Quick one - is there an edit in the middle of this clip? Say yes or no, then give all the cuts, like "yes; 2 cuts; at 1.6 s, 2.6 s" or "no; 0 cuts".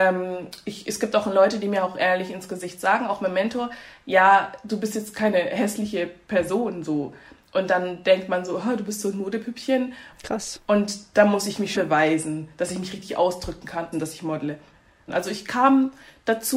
yes; 3 cuts; at 10.1 s, 11.8 s, 13.9 s